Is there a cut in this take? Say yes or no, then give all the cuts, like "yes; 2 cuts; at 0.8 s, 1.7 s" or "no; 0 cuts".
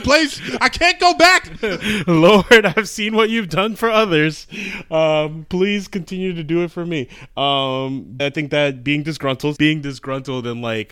yes; 2 cuts; at 8.2 s, 9.6 s